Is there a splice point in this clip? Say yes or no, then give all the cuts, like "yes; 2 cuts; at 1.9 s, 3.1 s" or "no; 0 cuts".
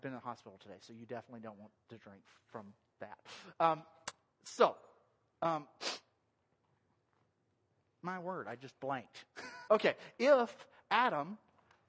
yes; 2 cuts; at 5.3 s, 9.7 s